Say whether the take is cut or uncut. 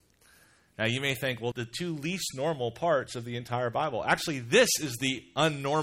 cut